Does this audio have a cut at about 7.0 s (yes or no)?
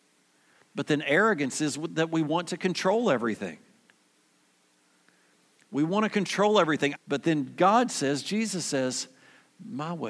yes